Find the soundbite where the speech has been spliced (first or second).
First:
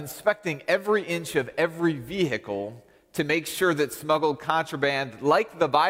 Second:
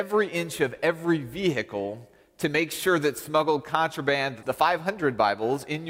second